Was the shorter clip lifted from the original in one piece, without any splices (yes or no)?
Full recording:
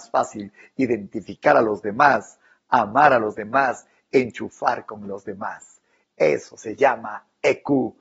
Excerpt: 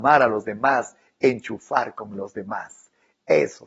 yes